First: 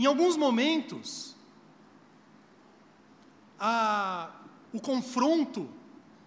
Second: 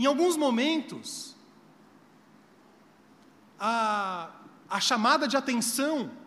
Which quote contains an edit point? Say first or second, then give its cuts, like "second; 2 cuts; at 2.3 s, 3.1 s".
second; 1 cut; at 4.6 s